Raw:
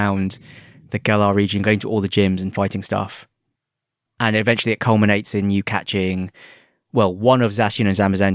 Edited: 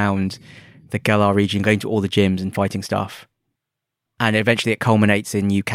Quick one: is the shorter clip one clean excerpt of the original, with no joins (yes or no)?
yes